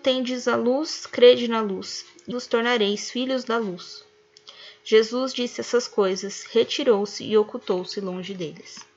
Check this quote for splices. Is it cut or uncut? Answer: cut